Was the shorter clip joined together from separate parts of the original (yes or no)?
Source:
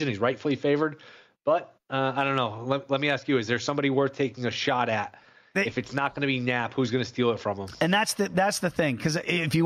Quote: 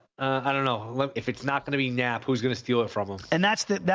yes